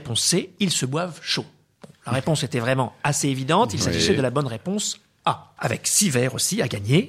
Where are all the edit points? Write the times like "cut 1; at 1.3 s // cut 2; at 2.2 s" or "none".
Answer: cut 1; at 5.6 s